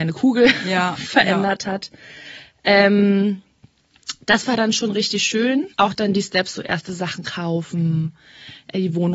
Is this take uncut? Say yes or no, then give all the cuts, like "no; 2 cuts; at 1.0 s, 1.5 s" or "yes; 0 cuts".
no; 1 cut; at 5.7 s